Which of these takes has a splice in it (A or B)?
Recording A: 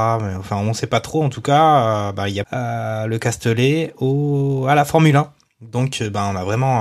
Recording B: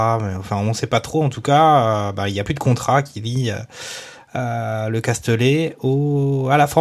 A